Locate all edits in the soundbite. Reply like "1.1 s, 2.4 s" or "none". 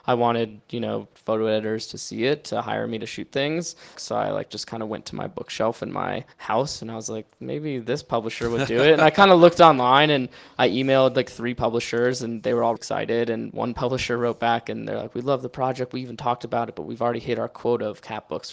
3.9 s, 6.3 s, 12.8 s